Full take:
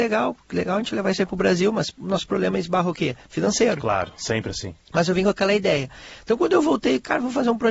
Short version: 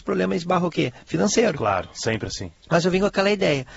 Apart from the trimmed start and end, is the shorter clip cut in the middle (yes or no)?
no